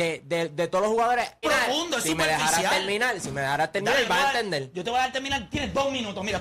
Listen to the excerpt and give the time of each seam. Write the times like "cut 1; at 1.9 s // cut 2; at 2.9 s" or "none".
cut 1; at 1.4 s